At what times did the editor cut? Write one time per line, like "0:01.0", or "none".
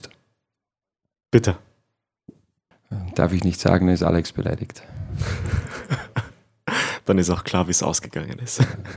0:02.7